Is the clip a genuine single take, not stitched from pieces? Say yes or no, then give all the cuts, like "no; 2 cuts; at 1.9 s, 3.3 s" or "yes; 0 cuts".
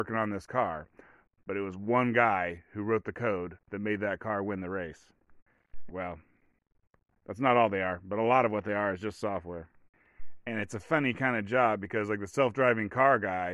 no; 1 cut; at 5.9 s